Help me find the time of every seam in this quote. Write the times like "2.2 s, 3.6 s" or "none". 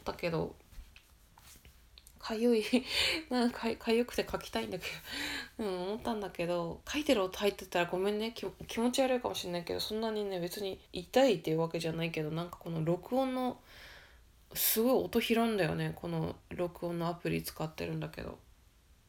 10.9 s

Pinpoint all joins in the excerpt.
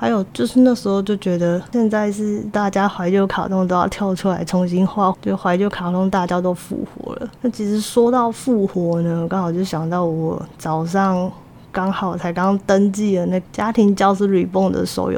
5.1 s

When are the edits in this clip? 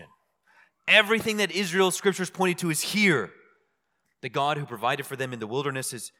none

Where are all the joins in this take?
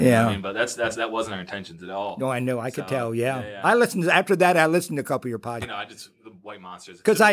5.6 s

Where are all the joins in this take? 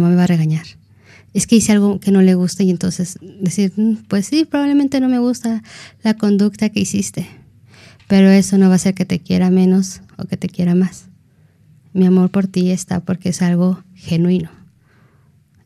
none

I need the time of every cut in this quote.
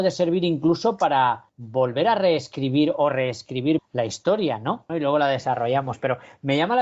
3.8 s, 4.9 s

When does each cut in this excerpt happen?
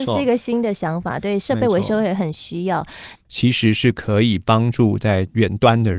3.2 s

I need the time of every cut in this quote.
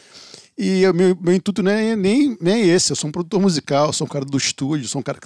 none

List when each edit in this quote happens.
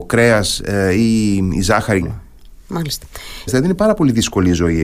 2.0 s, 3.5 s

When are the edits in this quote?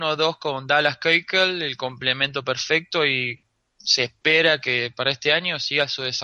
none

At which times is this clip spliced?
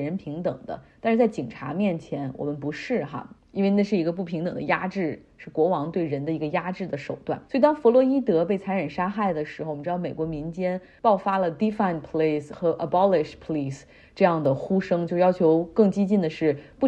7.5 s

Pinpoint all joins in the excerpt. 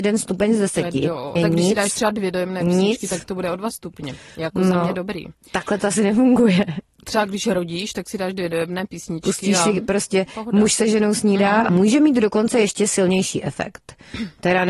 1.4 s, 11.7 s

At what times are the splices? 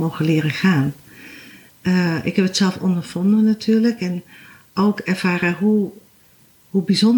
none

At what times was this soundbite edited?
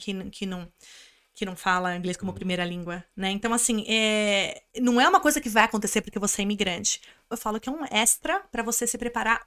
4.7 s, 7.3 s

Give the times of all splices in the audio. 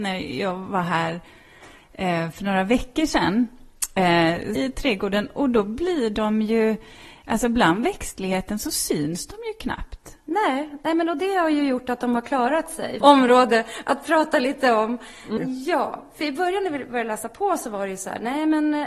4.6 s, 13.0 s, 15.4 s

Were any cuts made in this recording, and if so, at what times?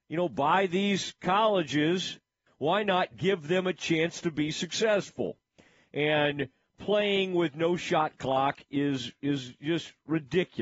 2.5 s

